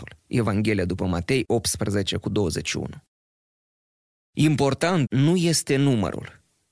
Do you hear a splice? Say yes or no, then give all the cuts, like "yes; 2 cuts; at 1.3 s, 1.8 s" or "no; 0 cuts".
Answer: yes; 1 cut; at 5.1 s